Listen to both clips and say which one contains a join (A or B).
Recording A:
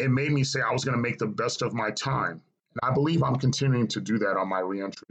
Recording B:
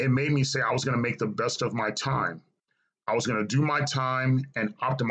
A